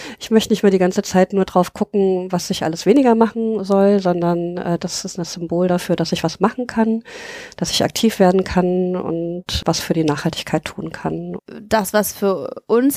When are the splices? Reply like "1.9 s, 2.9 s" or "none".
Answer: 4.8 s, 11.4 s